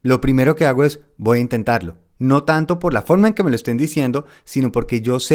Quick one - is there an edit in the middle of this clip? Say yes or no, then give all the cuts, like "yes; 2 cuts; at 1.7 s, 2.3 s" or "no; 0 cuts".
yes; 1 cut; at 2.1 s